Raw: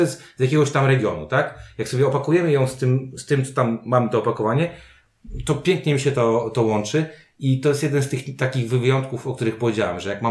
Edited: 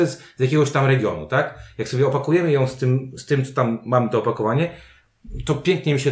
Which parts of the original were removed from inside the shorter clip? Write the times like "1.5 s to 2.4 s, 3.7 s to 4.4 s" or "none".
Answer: none